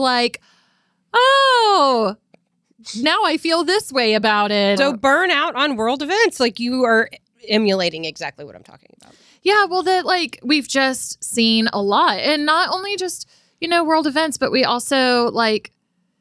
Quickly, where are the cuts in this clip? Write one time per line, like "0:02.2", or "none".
0:04.8